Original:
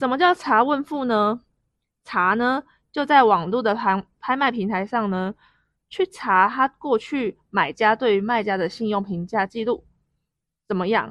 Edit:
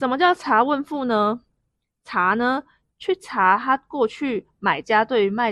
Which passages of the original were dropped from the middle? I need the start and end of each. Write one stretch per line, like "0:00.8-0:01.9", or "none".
0:02.9-0:05.8